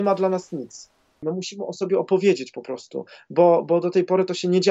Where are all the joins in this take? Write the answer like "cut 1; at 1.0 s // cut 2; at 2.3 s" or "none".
cut 1; at 1.2 s

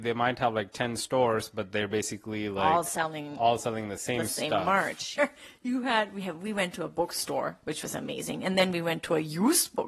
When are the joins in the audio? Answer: cut 1; at 5.2 s

